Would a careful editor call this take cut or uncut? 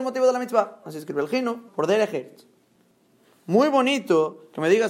cut